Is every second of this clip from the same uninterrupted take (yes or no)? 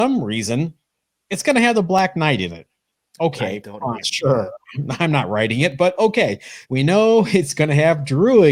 no